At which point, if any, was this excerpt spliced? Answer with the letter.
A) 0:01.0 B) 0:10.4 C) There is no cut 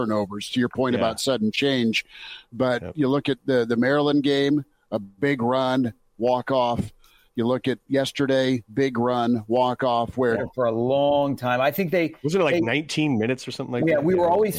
B